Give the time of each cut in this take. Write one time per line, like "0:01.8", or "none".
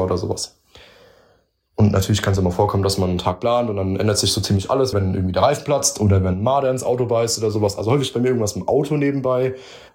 0:04.9